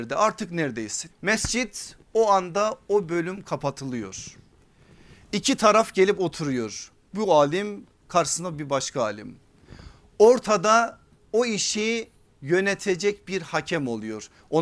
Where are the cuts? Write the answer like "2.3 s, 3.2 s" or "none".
1.1 s